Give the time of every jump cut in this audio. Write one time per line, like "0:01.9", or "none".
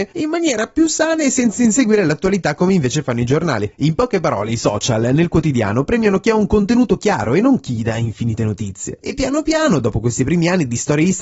none